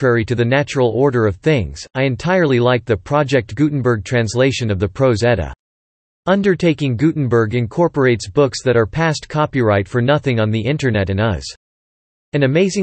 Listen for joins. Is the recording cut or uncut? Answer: uncut